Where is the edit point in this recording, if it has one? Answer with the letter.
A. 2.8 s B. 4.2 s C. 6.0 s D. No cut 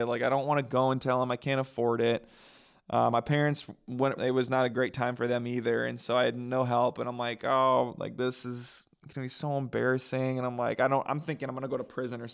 B